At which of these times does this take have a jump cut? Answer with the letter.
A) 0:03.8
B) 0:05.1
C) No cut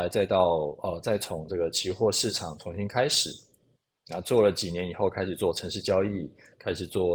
C